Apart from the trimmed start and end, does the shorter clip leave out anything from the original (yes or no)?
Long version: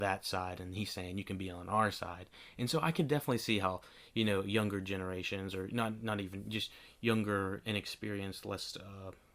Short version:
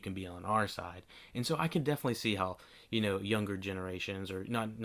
no